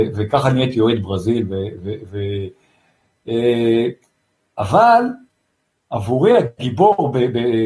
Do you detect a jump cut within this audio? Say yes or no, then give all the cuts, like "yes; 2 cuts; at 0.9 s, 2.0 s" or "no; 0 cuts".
no; 0 cuts